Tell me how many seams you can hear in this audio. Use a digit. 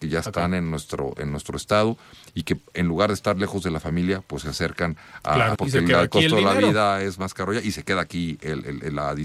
1